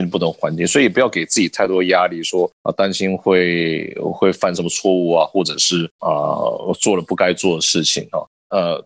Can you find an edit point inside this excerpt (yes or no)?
no